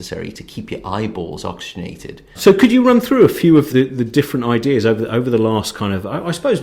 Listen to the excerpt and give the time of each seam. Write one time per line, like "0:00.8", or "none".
0:02.3
0:03.7